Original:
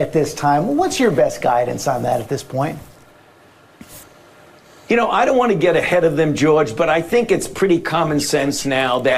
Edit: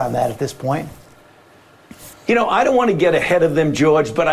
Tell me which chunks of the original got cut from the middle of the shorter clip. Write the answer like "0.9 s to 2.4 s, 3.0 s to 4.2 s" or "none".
4.1 s to 4.8 s